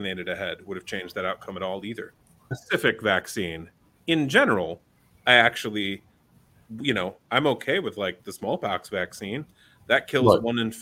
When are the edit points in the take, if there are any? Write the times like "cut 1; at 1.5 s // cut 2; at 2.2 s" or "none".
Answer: cut 1; at 2.5 s